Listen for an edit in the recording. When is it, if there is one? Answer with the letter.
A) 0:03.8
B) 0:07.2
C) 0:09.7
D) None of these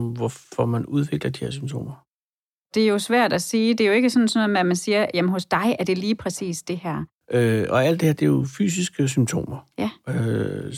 B